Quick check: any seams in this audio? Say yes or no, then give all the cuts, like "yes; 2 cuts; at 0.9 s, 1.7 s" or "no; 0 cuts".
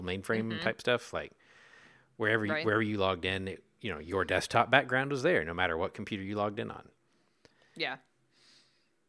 no; 0 cuts